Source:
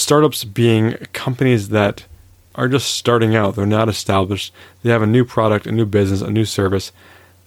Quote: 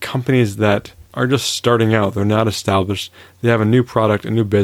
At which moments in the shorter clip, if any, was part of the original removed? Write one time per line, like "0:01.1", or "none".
0:01.1